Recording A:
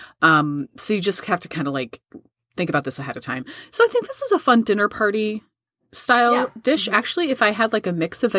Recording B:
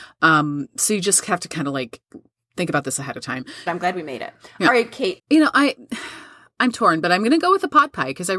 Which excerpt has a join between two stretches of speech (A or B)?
B